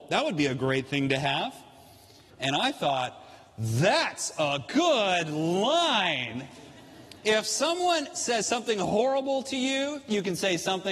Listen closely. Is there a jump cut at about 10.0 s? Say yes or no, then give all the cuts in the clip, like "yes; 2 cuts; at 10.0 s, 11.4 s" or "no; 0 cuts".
no; 2 cuts; at 2.3 s, 7.2 s